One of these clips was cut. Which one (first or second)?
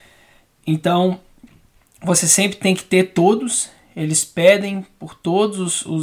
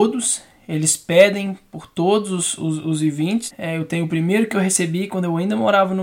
second